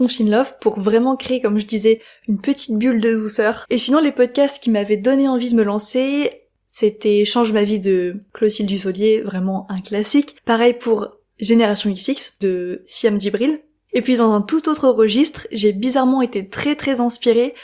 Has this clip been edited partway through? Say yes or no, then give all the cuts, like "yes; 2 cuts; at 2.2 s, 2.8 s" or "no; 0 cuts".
yes; 2 cuts; at 3.6 s, 12.4 s